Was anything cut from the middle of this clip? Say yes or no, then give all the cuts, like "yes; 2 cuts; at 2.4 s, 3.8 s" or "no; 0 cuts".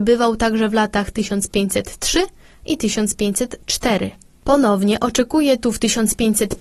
no; 0 cuts